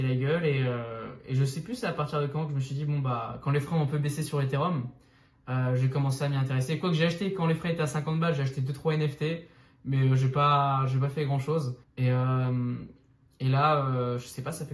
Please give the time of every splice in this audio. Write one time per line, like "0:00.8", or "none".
0:11.8